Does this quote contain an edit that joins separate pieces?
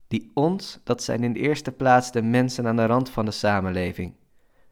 no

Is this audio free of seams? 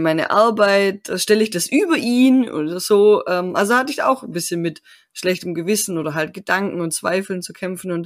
yes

